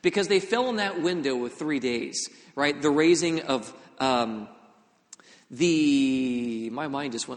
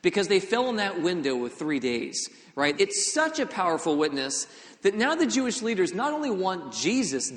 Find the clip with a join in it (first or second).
second